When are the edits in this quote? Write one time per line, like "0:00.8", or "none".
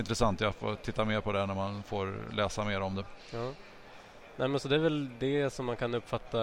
none